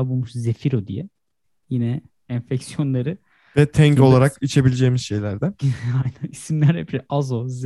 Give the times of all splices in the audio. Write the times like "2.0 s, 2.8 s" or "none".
none